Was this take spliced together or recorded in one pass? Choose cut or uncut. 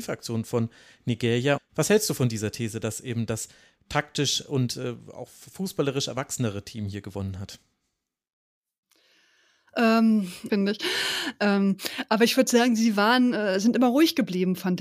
cut